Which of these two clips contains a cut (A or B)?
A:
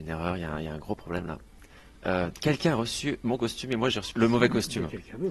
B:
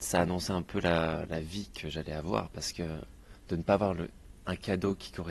A